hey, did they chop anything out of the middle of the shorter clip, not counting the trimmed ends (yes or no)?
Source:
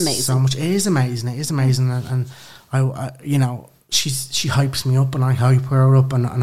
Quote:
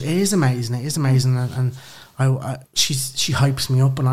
yes